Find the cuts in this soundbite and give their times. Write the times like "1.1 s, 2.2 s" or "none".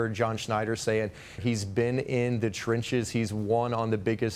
1.4 s